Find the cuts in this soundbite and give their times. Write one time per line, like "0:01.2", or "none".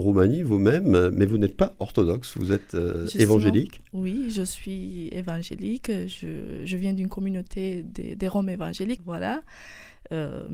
0:09.0